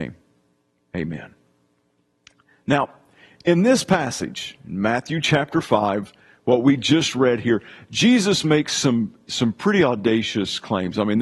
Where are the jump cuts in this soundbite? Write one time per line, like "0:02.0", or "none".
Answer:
none